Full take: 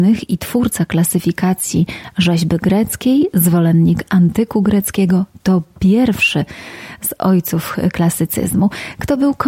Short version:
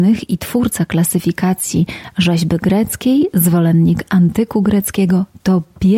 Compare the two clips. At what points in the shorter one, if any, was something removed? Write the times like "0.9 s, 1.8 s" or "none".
none